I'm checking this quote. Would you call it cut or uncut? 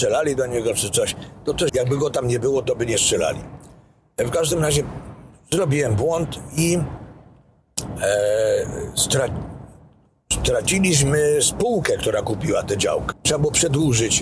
cut